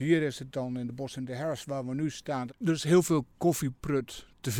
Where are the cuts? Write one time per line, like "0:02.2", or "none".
0:02.5